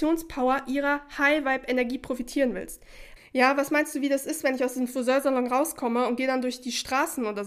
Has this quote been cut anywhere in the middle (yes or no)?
yes